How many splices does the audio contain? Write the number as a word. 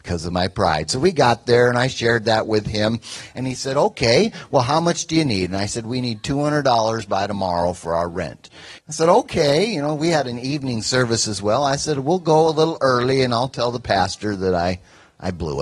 one